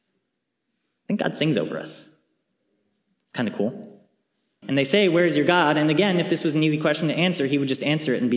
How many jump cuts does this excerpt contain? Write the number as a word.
one